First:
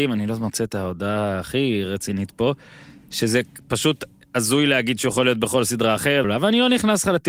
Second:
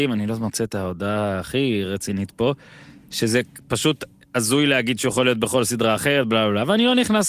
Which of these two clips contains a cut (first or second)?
first